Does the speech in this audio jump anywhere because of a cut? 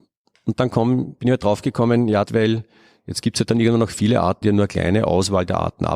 yes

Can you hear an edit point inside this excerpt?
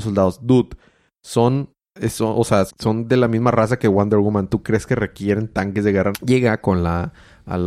yes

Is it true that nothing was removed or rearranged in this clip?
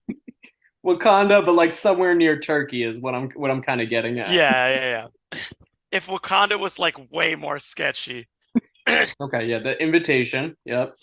no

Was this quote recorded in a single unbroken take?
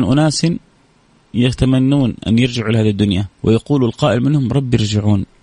no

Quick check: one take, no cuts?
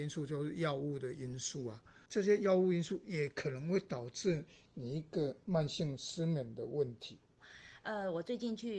no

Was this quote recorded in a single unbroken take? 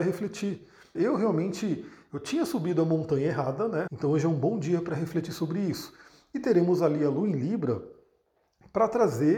no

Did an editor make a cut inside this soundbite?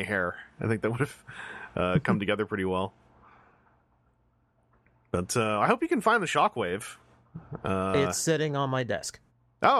no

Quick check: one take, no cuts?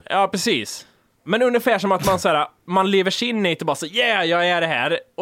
yes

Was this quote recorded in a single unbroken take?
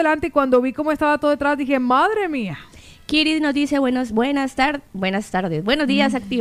yes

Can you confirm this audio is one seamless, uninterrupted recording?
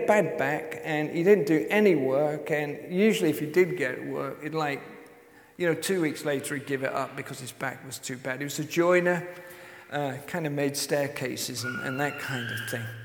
yes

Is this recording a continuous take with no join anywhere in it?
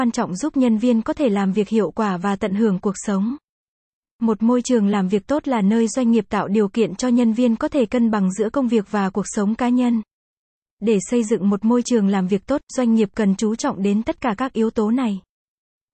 yes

